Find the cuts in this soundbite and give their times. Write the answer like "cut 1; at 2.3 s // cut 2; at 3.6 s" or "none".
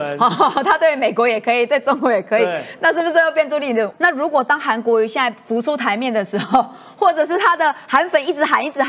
cut 1; at 3.9 s